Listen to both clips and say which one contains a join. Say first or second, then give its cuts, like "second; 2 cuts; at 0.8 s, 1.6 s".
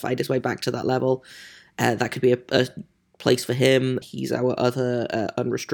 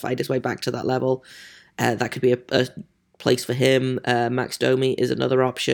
first; 1 cut; at 4.0 s